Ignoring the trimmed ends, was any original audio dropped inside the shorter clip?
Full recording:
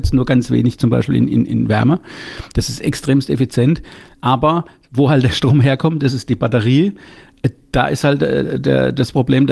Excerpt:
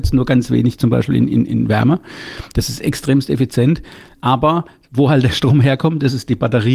no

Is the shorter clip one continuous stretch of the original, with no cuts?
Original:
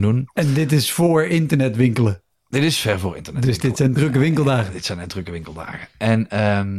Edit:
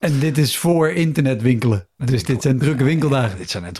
no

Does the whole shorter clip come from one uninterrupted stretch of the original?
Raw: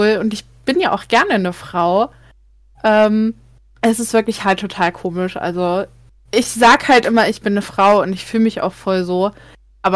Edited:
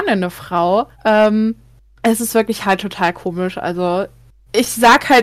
no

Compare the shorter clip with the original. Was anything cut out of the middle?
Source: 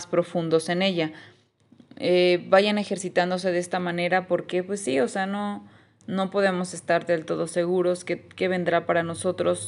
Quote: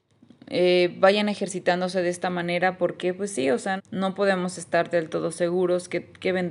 yes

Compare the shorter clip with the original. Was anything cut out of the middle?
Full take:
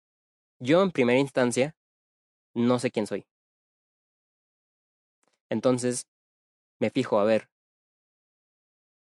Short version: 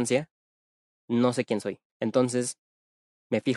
yes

